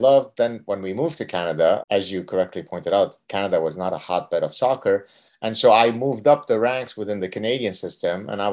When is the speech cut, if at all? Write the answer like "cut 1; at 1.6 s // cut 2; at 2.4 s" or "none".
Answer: cut 1; at 1.8 s